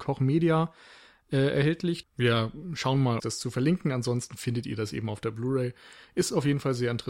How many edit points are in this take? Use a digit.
2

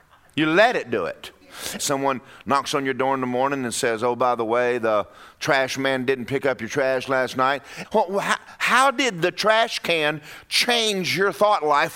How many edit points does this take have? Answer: 2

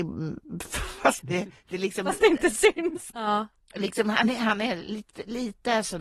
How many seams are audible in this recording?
2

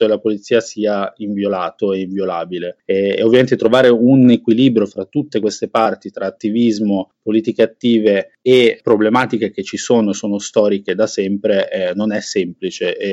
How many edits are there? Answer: 0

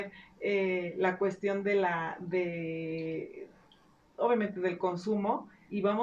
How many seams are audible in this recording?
0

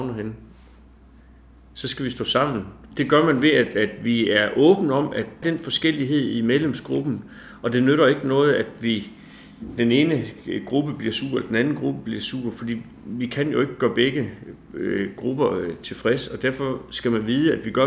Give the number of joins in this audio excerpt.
2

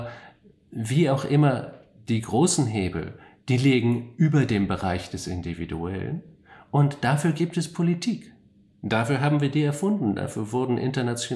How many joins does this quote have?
0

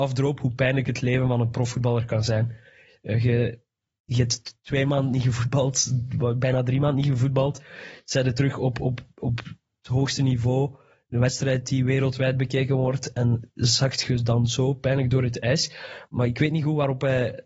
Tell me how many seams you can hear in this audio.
0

